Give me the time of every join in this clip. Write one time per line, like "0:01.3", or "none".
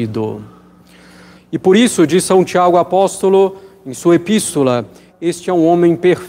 0:01.3
0:05.1